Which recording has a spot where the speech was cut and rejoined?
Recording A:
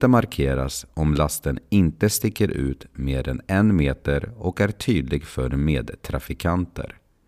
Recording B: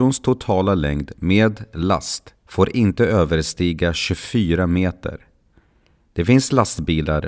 B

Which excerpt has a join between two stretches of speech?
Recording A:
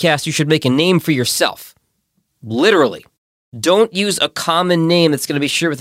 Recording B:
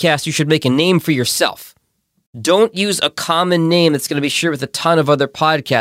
B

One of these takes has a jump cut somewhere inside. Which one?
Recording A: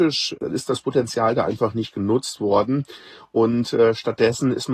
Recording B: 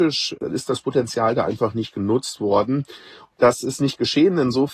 B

